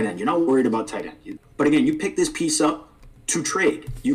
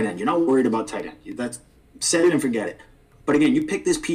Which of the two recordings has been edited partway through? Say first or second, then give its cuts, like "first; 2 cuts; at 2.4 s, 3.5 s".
first; 1 cut; at 1.4 s